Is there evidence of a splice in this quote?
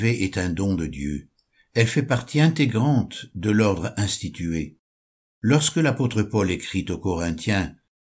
no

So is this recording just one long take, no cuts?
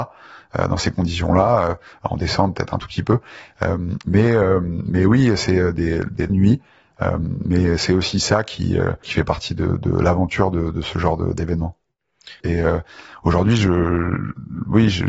no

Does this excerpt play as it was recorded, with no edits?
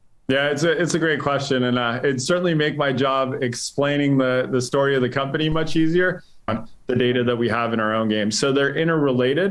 no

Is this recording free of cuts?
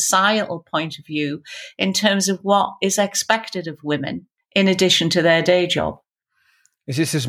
yes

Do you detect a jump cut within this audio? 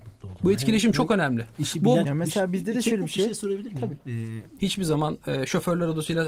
yes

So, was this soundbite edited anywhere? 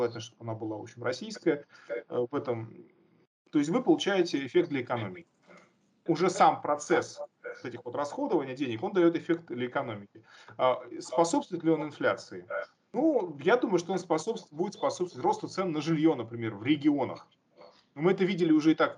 yes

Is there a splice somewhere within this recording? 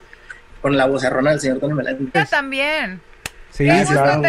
yes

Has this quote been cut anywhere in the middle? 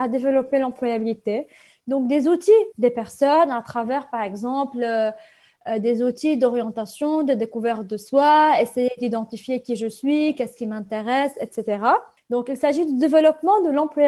yes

